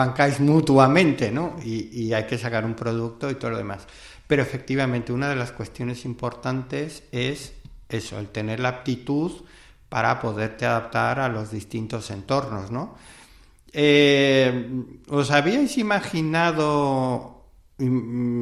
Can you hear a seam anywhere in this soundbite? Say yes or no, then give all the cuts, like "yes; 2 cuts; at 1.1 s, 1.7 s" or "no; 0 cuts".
no; 0 cuts